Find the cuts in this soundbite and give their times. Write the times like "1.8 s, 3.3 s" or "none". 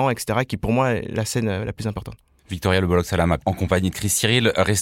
3.4 s